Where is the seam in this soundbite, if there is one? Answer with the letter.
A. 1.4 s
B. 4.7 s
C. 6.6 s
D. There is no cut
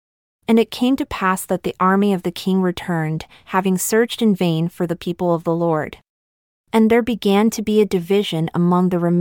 C